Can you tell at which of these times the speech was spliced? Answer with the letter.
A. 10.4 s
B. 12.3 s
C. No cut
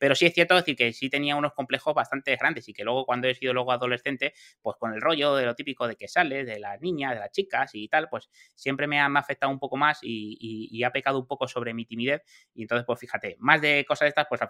C